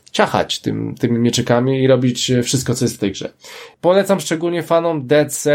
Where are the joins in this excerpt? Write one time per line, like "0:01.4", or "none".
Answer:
0:03.7